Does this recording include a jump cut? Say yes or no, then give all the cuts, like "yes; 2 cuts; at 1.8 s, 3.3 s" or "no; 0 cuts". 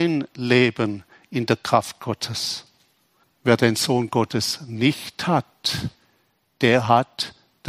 yes; 1 cut; at 3.2 s